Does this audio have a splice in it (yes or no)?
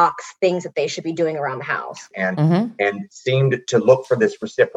yes